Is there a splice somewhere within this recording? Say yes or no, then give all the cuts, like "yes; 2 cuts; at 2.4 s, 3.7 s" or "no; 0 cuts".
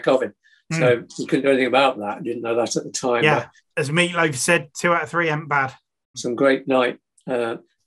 yes; 2 cuts; at 3.7 s, 6.1 s